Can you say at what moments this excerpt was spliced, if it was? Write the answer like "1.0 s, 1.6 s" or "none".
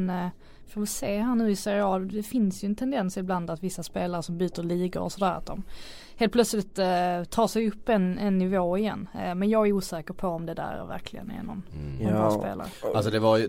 none